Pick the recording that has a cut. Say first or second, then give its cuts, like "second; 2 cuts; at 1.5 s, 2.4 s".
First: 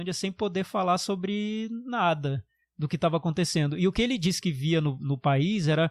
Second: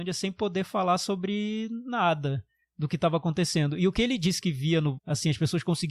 second; 1 cut; at 5.0 s